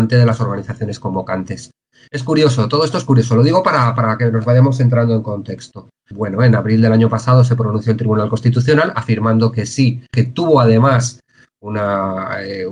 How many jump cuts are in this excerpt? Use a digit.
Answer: 2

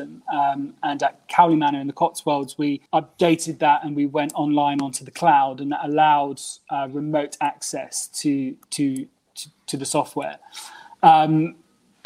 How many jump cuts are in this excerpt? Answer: 1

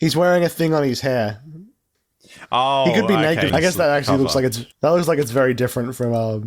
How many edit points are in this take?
2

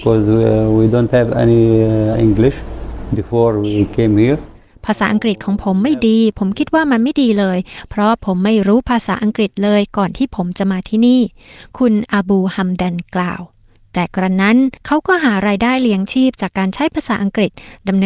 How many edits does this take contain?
1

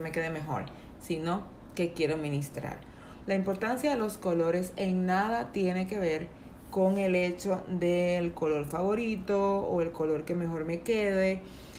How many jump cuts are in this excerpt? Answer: 1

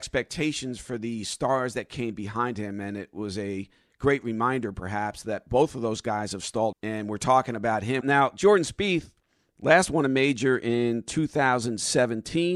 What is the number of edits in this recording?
2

